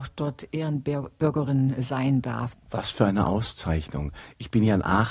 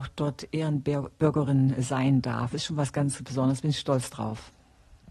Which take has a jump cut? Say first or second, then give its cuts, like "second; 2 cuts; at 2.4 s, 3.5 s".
first; 1 cut; at 2.5 s